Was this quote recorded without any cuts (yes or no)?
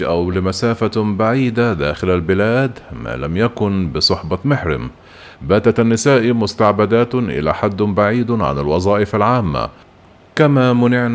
no